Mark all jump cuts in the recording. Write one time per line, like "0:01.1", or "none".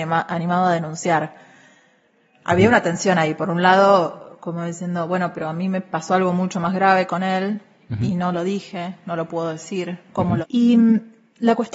0:10.4